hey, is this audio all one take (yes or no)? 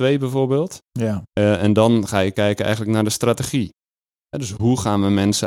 yes